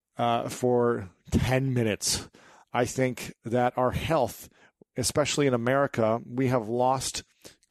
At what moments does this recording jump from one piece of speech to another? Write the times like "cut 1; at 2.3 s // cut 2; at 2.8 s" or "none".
none